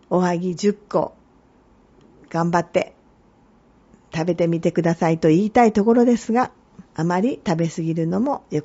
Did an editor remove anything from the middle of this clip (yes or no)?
yes